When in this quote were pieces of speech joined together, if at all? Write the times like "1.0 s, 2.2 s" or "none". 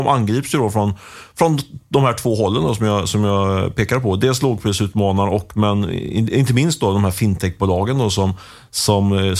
none